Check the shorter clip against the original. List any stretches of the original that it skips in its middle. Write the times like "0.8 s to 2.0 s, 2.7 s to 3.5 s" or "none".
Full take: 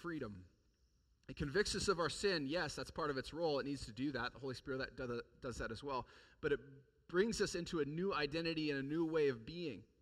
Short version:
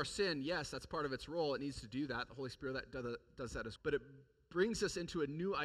5.8 s to 6.3 s